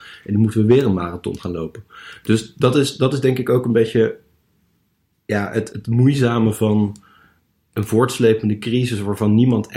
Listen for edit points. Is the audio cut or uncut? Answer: cut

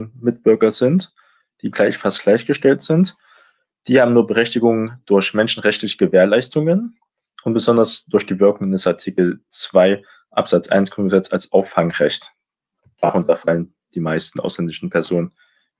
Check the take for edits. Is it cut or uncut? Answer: uncut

